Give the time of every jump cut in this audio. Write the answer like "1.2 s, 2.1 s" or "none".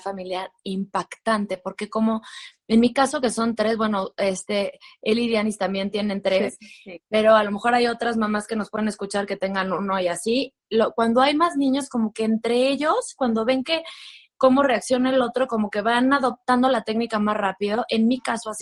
none